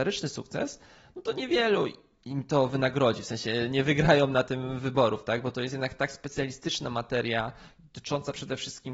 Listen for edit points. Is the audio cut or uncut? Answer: uncut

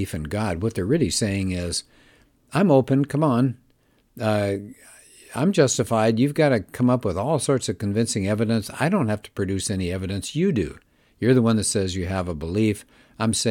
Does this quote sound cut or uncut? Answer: uncut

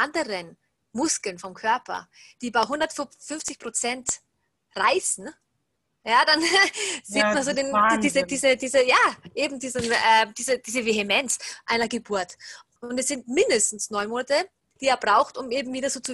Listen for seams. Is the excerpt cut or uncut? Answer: cut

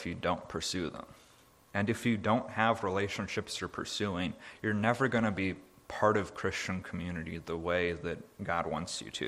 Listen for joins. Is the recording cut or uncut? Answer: uncut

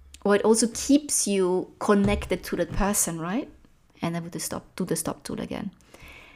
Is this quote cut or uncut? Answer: cut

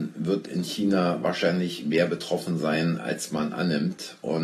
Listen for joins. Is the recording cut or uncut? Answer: uncut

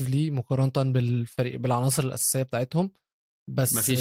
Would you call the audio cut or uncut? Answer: uncut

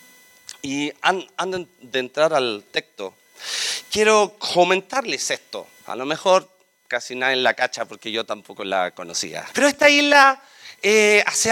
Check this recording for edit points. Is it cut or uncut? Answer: cut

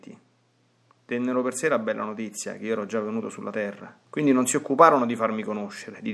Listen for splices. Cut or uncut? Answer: cut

